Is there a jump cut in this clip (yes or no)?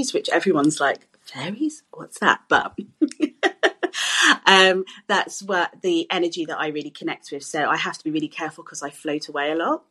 no